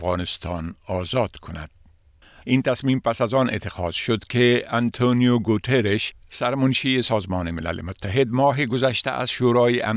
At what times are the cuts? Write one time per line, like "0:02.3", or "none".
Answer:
0:02.4